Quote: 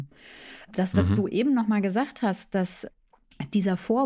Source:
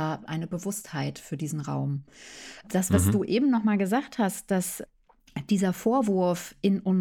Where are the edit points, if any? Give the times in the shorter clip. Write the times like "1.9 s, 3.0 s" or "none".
none